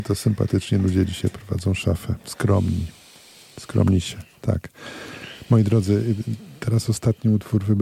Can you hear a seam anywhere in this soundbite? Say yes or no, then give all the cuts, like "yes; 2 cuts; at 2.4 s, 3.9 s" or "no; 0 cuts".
no; 0 cuts